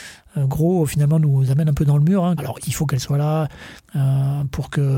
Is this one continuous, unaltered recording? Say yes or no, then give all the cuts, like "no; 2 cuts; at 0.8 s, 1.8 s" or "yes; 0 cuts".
no; 2 cuts; at 2.4 s, 3.8 s